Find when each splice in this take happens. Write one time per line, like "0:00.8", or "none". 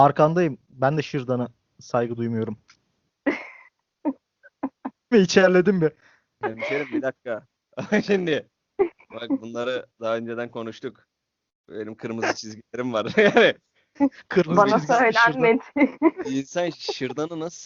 0:05.1